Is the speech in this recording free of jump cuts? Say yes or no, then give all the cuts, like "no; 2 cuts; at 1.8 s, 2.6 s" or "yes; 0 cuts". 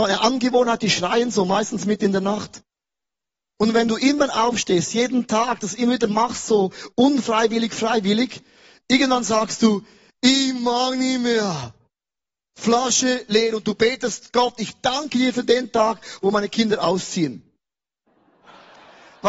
yes; 0 cuts